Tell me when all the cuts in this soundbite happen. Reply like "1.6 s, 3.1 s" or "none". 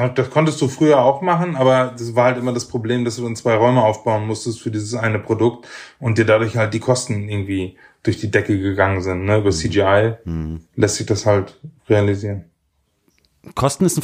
10.7 s, 11.8 s